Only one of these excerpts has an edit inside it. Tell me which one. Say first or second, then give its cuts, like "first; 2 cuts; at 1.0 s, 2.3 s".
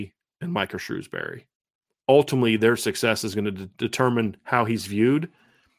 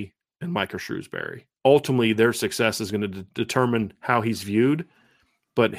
second; 1 cut; at 1.6 s